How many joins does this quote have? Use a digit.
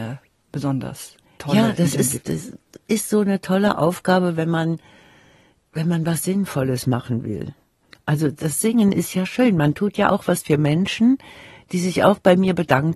1